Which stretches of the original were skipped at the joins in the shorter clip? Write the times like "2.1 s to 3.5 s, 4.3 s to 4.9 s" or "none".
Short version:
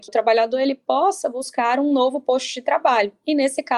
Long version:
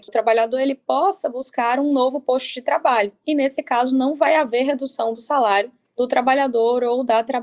none